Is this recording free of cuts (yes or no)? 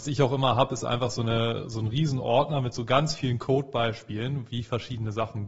yes